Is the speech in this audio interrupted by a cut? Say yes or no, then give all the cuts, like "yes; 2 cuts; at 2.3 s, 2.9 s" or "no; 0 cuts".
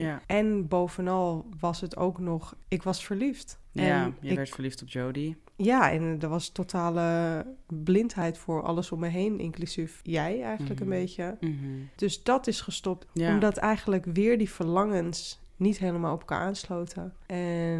yes; 2 cuts; at 11.4 s, 13.1 s